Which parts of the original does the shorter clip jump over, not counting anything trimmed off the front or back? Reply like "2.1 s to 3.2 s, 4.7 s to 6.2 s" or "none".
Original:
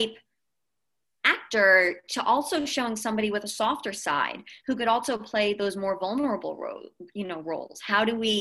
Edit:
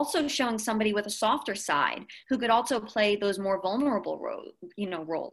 none